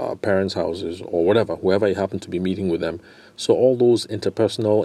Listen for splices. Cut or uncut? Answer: uncut